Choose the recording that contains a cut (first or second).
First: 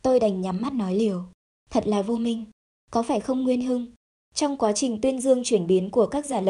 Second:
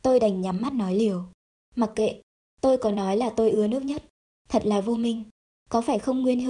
first